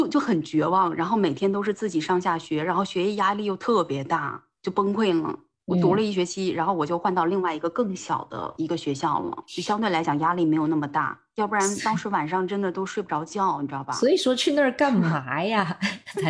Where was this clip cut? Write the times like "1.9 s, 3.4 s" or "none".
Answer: none